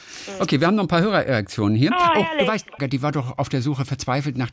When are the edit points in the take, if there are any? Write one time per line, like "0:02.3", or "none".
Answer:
0:02.8